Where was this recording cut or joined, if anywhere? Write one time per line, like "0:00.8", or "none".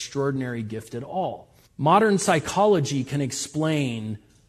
0:01.7